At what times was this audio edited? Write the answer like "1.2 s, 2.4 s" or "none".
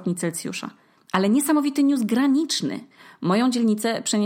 1.0 s

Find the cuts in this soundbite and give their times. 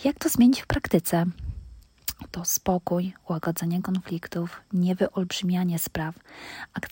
2.3 s

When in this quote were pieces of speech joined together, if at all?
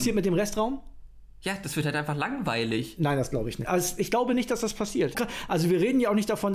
3.6 s, 5.1 s

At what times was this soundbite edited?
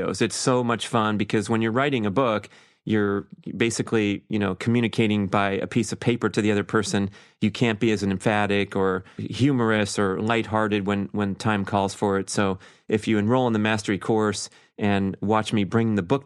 9.2 s

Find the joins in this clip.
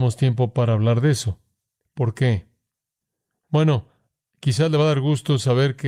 none

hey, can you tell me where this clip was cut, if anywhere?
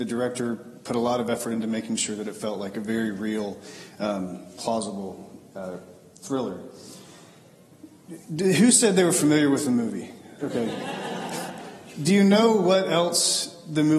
10.4 s

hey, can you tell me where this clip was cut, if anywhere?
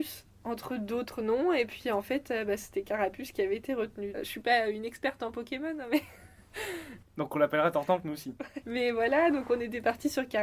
4.1 s, 7.0 s, 8.6 s

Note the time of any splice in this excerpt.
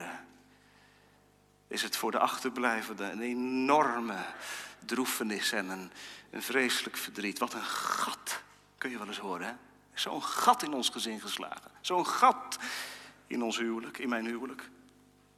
none

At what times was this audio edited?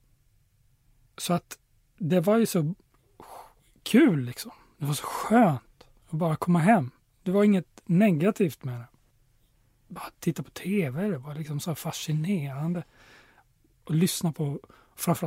none

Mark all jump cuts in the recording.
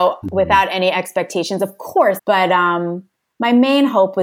2.2 s

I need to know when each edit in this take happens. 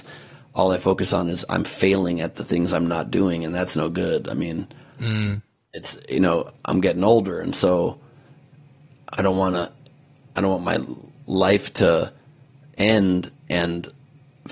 none

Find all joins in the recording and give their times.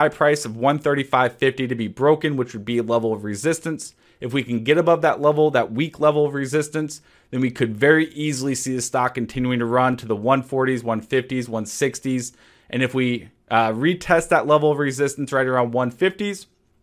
none

